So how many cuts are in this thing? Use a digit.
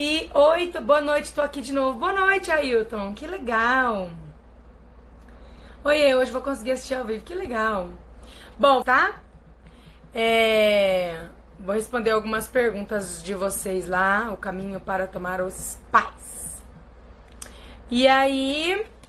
1